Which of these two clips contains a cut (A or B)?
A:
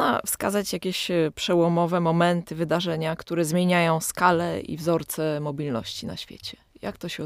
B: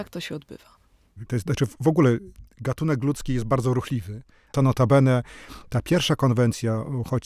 B